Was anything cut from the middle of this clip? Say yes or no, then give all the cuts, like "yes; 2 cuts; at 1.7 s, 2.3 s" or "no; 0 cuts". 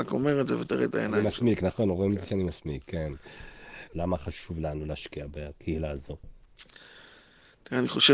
yes; 1 cut; at 3.9 s